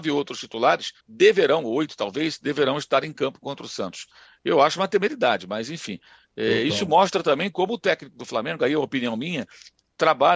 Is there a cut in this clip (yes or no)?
yes